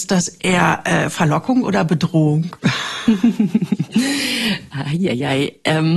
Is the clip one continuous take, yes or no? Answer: no